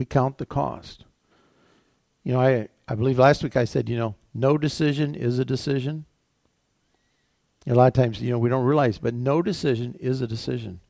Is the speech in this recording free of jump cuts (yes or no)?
yes